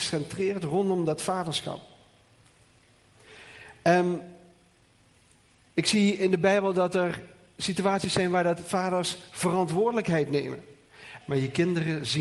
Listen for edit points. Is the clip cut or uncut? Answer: cut